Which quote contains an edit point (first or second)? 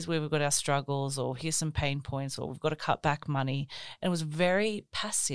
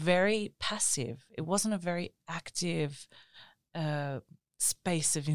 first